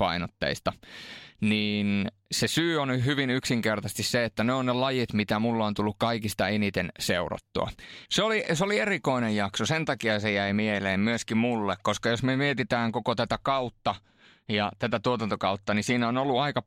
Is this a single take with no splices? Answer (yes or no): no